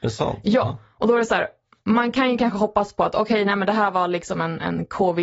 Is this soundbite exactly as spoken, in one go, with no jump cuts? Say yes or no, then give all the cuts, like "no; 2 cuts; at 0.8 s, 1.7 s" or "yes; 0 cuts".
yes; 0 cuts